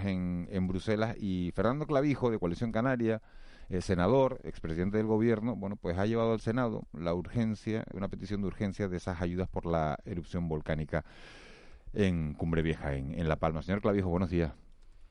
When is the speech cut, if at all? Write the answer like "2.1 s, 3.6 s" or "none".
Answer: 7.9 s